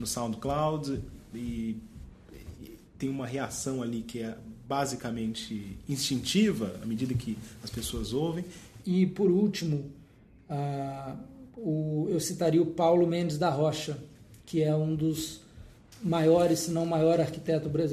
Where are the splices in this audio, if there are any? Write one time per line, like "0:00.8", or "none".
0:08.8